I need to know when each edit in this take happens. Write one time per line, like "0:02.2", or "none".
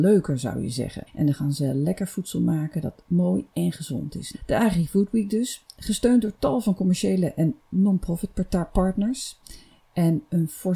0:01.1
0:04.3